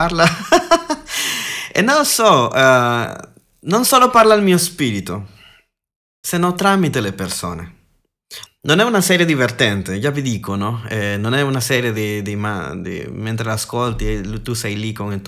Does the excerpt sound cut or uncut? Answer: cut